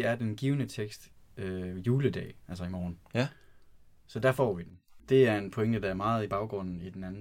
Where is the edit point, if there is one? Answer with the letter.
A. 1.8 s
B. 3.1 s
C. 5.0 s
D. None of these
C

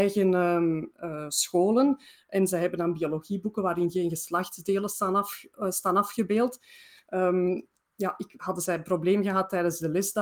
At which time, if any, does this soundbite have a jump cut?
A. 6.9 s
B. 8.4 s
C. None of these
B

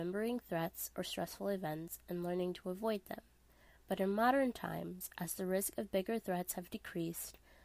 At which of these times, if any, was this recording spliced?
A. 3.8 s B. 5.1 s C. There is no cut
C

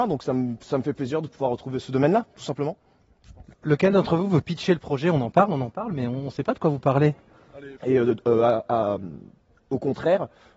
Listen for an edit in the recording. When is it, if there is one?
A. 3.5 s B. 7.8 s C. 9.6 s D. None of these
B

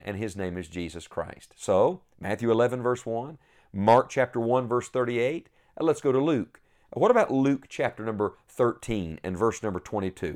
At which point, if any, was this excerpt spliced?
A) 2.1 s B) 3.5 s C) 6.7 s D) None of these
D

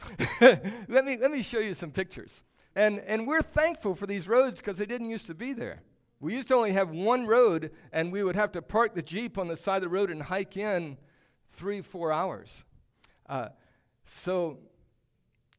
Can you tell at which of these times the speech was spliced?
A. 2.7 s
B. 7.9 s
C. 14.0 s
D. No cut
A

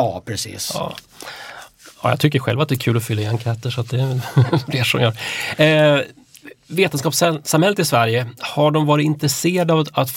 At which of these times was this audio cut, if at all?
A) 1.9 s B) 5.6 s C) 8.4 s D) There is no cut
D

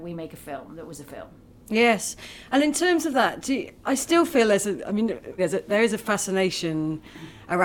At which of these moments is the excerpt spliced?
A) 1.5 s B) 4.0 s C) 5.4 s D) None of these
C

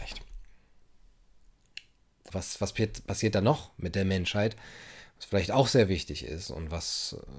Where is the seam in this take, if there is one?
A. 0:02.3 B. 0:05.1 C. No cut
A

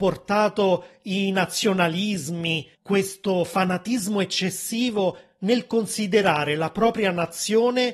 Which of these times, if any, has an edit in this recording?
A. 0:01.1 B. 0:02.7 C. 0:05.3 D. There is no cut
B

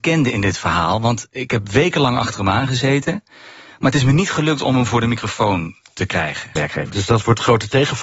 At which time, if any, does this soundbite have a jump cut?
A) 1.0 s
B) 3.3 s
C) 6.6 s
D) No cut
C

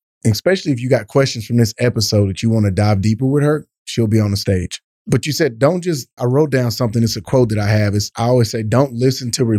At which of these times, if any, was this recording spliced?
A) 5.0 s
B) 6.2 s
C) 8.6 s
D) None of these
B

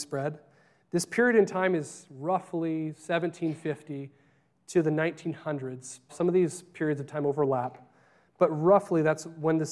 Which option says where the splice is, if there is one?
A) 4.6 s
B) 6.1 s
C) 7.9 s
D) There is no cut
B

